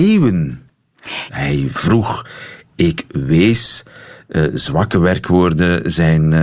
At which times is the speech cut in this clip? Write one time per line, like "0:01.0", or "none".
0:01.3